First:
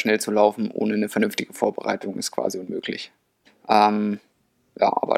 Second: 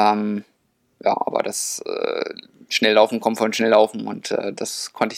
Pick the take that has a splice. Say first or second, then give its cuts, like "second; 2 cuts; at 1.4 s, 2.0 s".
first; 1 cut; at 3.5 s